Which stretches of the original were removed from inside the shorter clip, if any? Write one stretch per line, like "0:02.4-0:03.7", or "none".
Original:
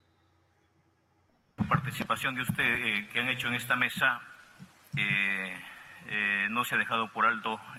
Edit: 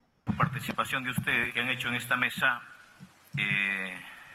0:02.8-0:03.1

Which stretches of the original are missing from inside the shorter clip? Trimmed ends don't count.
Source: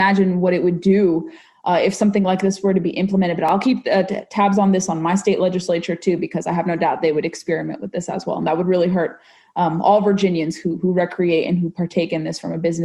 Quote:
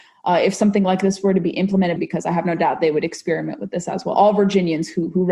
0:03.4-0:06.2
0:08.3-0:09.8

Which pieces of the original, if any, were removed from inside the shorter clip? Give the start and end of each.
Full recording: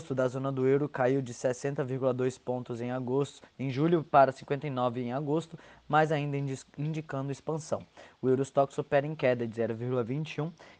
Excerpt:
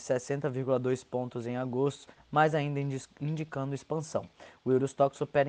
0:03.5-0:05.7

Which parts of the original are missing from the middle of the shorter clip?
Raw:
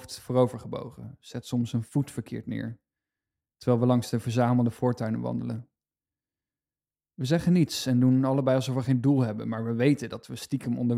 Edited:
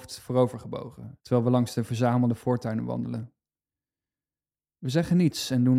0:01.2-0:03.5

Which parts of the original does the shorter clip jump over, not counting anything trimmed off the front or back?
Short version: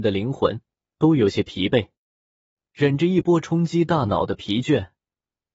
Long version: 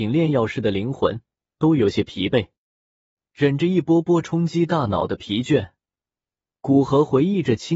0:03.8-0:04.0

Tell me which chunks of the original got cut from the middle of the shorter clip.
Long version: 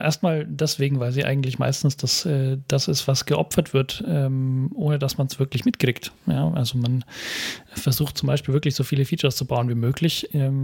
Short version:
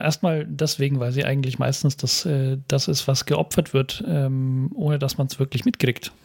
none

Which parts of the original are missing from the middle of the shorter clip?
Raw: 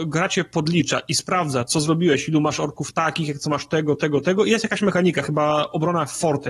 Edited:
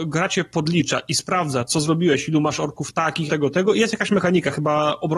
0:03.3-0:04.0

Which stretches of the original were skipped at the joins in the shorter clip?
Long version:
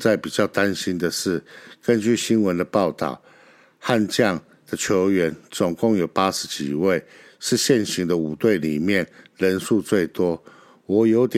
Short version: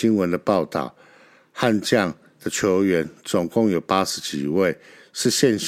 none

